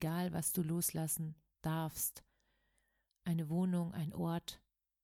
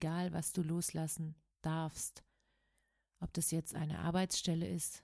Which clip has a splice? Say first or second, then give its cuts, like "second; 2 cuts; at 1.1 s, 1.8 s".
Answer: first; 1 cut; at 3.1 s